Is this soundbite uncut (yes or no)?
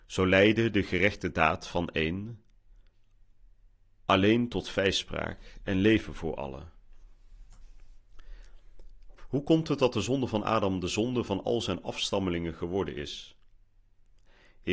no